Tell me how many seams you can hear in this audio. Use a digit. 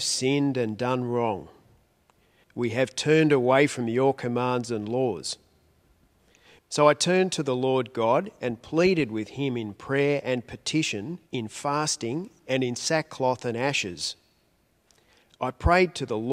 3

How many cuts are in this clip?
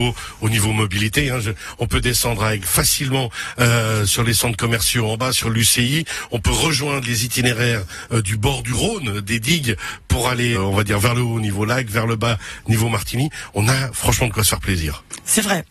1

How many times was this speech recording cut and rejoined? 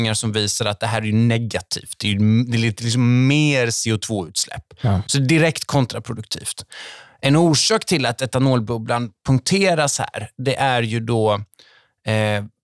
0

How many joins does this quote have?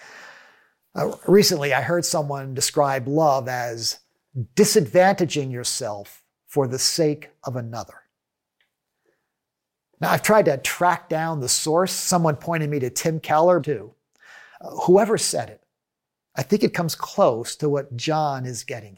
1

